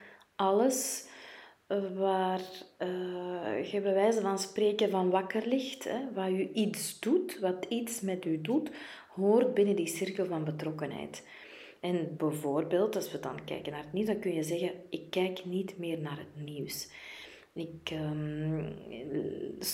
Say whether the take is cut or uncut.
cut